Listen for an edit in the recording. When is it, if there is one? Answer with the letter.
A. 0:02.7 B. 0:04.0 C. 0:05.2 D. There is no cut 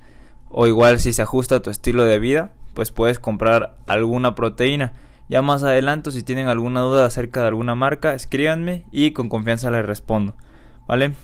D